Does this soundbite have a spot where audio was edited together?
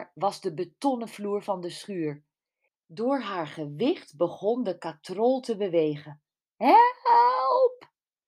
yes; 2 cuts; at 2.7 s, 6.6 s

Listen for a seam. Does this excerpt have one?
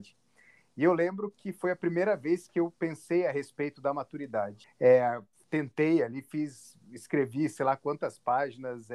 yes; 1 cut; at 4.6 s

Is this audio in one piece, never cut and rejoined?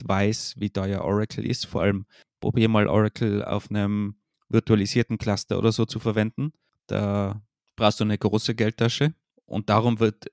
yes; 0 cuts

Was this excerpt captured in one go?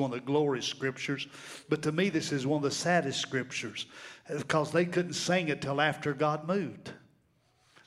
yes; 0 cuts

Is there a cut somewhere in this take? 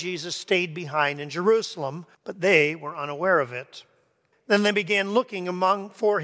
yes; 2 cuts; at 2.1 s, 4.3 s

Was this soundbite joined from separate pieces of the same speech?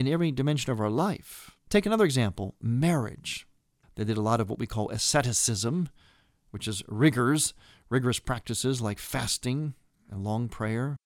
yes; 1 cut; at 3.8 s

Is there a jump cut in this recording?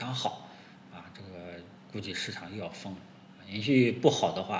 no; 0 cuts

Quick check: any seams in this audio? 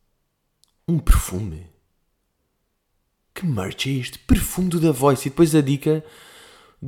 no; 0 cuts

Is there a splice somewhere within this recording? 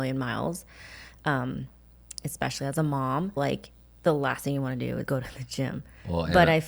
yes; 2 cuts; at 3.4 s, 5.1 s

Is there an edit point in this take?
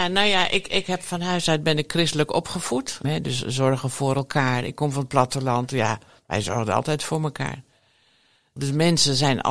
yes; 2 cuts; at 3.0 s, 8.6 s

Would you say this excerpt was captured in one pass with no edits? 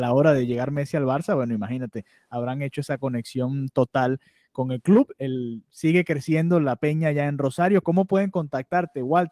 yes; 0 cuts

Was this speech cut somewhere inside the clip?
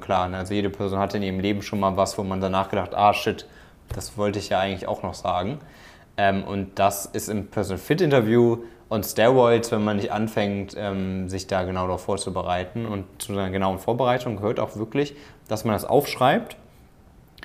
no; 0 cuts

